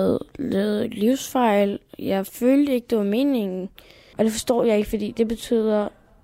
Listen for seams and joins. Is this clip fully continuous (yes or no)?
no